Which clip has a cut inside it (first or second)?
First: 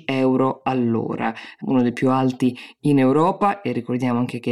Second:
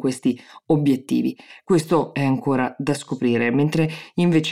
second